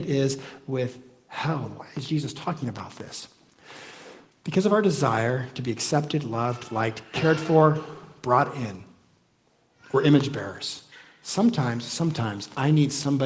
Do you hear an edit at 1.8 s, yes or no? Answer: no